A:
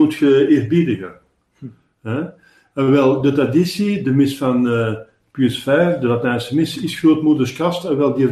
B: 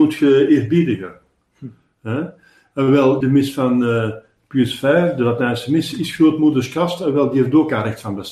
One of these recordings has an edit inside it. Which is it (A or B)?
B